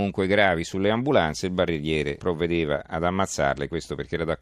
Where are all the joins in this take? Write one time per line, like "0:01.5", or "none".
0:02.2